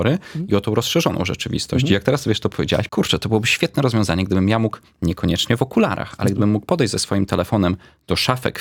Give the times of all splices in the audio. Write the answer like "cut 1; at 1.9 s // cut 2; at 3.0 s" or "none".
cut 1; at 2.9 s